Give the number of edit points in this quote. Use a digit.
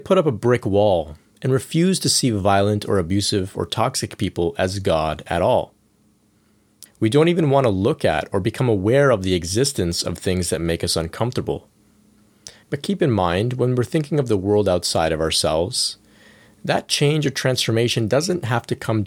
2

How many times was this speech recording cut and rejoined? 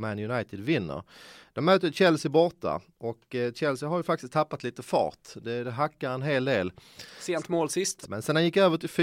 1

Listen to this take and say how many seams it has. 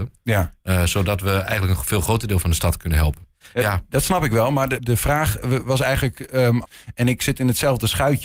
2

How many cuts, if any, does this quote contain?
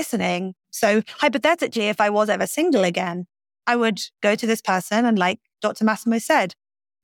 0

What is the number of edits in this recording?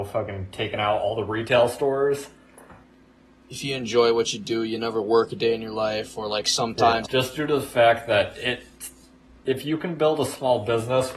2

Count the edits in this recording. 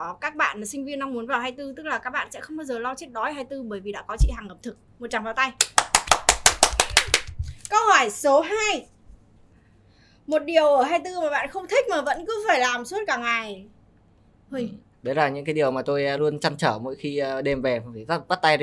2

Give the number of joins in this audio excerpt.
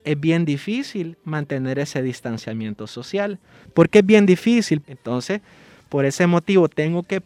2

